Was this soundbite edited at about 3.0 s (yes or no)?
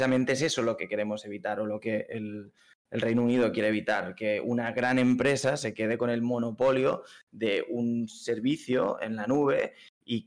no